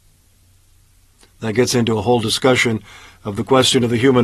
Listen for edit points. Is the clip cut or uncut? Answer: uncut